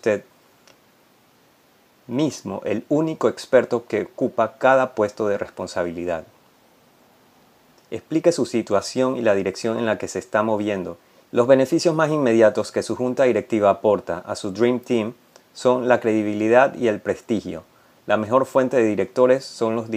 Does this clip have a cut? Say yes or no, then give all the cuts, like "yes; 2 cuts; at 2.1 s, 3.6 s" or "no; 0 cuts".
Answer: yes; 2 cuts; at 7.8 s, 11.2 s